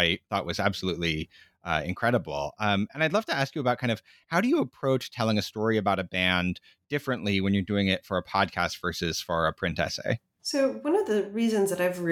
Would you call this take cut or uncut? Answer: cut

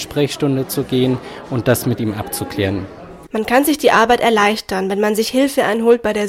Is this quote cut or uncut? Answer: cut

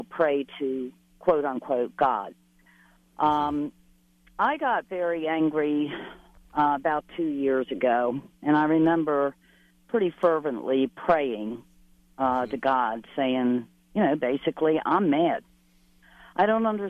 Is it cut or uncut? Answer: uncut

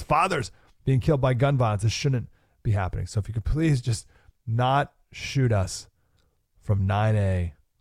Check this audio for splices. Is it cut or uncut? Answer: uncut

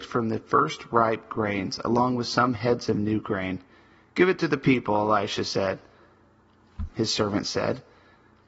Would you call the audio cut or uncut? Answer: cut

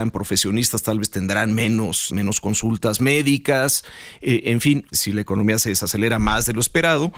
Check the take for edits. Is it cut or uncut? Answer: cut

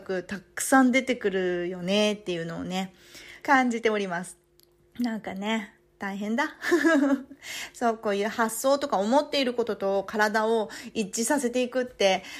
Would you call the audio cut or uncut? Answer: cut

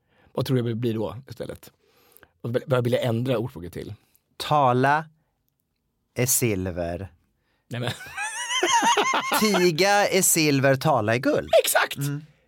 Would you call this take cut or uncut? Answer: uncut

